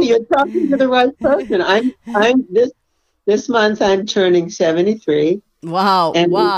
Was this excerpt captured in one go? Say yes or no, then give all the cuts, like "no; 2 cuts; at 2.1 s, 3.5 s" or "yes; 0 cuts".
yes; 0 cuts